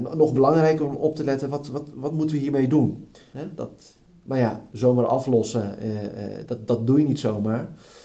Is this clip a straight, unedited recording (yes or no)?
no